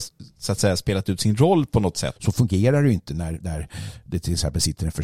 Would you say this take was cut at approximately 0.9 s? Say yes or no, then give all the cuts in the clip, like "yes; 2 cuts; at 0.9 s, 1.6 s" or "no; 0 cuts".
no; 2 cuts; at 2.2 s, 3.4 s